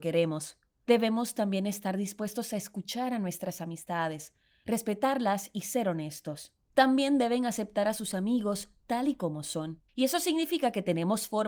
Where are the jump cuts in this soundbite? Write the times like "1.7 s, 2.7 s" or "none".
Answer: 6.7 s, 9.9 s

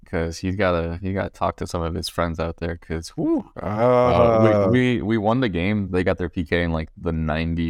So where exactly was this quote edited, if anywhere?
3.5 s, 5.9 s

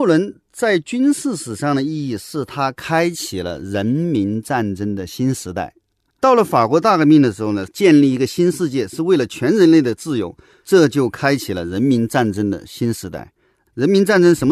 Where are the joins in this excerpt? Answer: 7.7 s

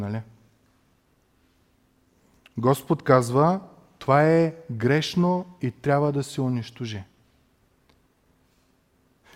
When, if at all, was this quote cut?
none

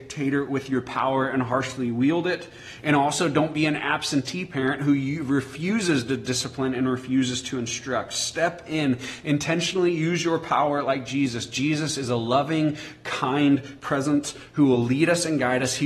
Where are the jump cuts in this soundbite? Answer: none

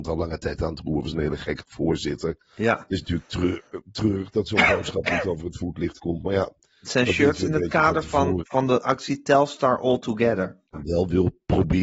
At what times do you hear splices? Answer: 8.4 s, 10.7 s

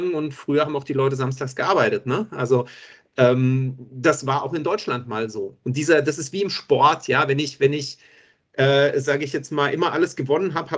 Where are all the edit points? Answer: 5.6 s

